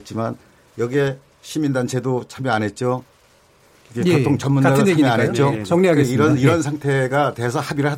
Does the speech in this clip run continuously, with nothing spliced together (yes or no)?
yes